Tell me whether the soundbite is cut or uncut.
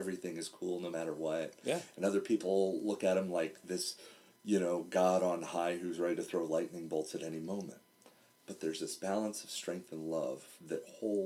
uncut